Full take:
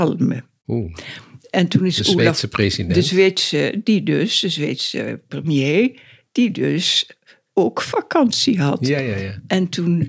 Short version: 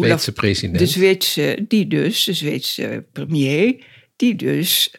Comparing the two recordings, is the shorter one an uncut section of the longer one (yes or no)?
yes